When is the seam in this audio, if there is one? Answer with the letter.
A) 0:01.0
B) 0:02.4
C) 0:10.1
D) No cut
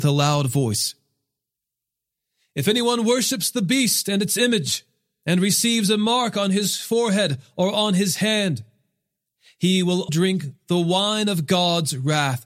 C